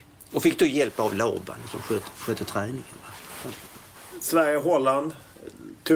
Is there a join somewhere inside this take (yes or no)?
no